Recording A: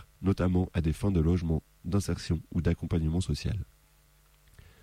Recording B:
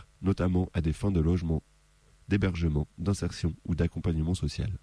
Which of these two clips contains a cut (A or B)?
A